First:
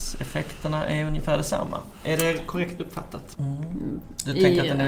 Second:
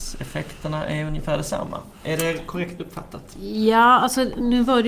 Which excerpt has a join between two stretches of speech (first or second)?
first